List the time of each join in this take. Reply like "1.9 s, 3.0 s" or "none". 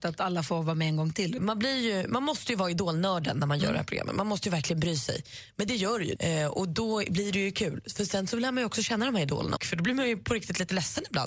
1.4 s, 6.2 s, 9.6 s